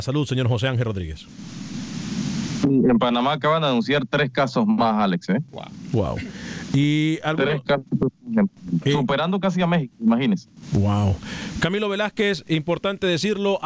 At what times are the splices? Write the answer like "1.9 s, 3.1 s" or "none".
none